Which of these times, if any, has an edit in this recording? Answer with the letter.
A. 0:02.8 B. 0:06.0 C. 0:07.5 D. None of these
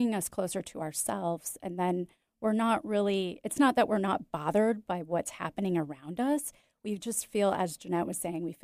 D